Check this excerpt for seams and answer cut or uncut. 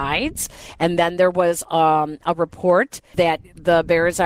cut